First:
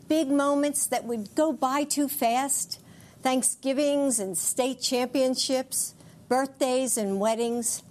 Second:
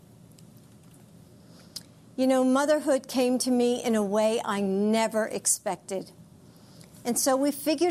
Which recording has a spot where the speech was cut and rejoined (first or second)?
second